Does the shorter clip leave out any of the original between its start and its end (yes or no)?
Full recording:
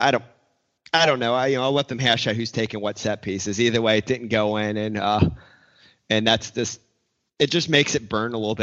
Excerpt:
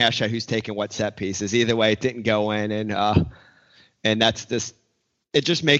no